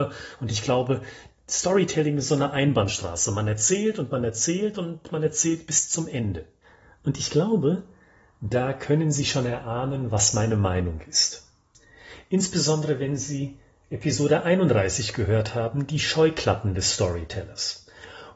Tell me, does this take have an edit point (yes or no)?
no